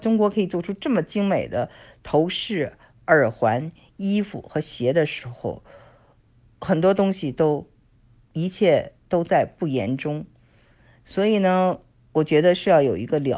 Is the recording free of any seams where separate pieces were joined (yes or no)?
yes